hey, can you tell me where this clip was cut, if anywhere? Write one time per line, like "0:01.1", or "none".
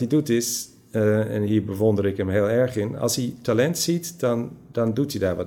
none